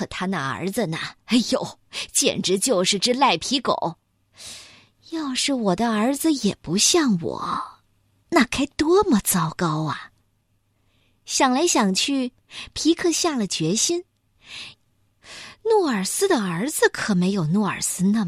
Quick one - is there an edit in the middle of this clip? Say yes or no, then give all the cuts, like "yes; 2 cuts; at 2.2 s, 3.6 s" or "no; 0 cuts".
yes; 1 cut; at 14.7 s